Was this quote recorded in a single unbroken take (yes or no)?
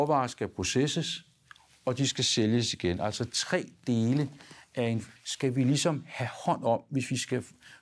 no